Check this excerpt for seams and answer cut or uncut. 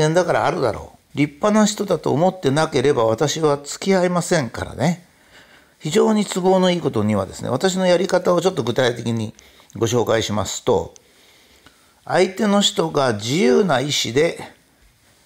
cut